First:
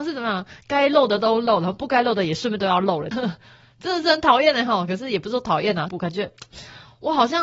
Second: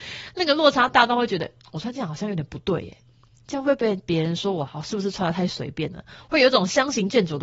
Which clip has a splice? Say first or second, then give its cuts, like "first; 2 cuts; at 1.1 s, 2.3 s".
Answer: first; 2 cuts; at 3.1 s, 5.9 s